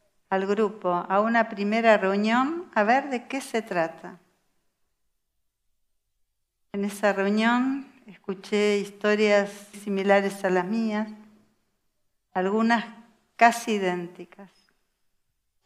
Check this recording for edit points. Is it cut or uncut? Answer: cut